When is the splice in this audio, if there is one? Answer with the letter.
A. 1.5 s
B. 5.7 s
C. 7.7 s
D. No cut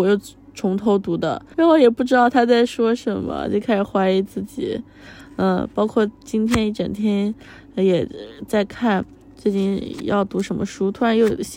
A